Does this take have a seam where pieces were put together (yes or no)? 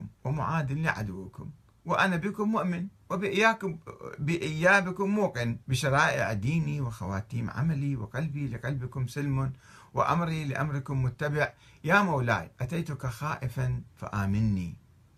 yes